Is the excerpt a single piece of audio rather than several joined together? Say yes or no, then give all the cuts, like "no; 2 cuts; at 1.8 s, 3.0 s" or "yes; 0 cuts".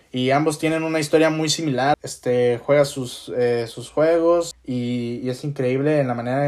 no; 2 cuts; at 1.9 s, 4.5 s